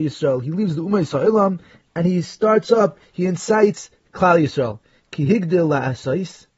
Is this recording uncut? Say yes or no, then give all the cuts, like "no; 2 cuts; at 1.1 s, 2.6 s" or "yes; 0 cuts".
yes; 0 cuts